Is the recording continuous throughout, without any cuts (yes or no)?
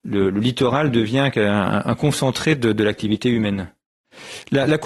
yes